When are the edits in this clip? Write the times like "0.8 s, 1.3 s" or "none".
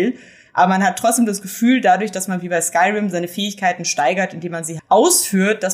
4.8 s